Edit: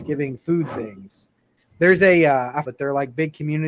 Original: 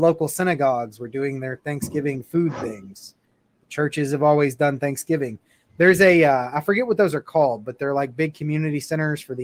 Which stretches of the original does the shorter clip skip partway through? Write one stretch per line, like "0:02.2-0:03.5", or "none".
0:03.4-0:05.6
0:06.6-0:07.6